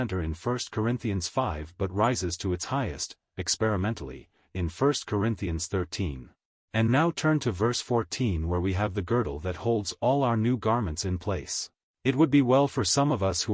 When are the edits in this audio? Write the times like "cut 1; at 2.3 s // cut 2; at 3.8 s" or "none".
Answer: cut 1; at 6.7 s // cut 2; at 11.9 s